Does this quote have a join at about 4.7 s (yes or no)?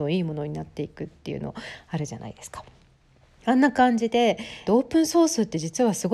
yes